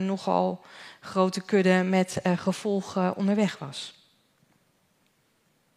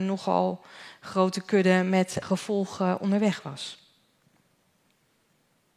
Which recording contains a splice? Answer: second; 1 cut; at 2.2 s

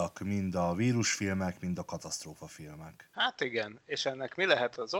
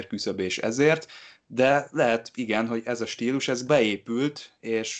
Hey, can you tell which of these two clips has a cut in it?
first; 1 cut; at 3.1 s

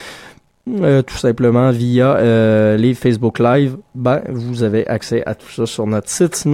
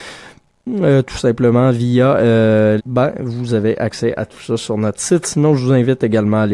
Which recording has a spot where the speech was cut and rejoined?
second; 1 cut; at 2.8 s

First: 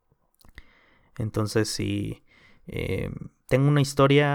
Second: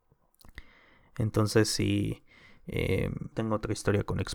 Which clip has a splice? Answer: second; 1 cut; at 3.3 s

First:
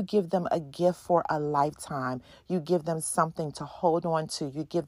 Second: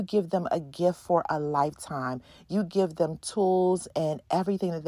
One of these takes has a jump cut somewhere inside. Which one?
first; 1 cut; at 2.3 s

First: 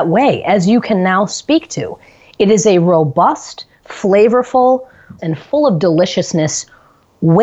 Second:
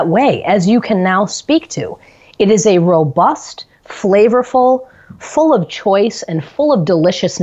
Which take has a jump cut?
first; 1 cut; at 5.2 s

